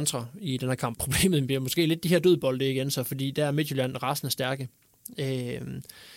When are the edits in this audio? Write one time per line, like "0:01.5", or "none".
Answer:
0:00.9